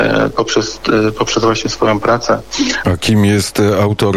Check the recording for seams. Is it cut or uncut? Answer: cut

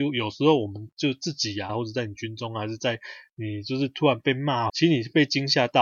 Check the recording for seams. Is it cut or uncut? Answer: cut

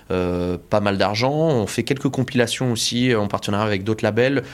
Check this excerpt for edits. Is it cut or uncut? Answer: uncut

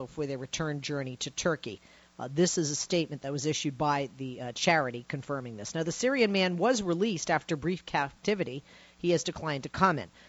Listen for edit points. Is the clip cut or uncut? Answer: uncut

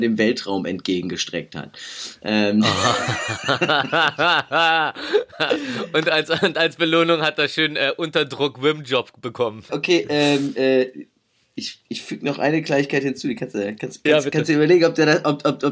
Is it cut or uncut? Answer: cut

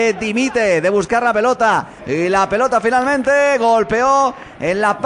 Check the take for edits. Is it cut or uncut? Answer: cut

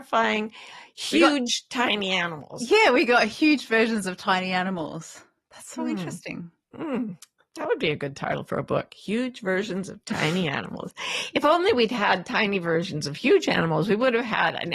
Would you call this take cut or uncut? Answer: uncut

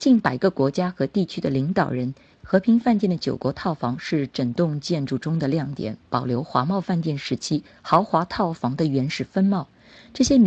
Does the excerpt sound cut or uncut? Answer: cut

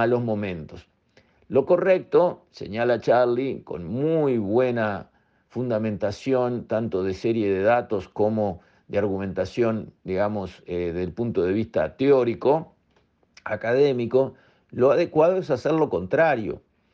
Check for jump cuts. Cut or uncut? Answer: uncut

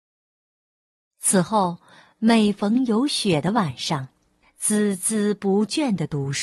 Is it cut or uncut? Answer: cut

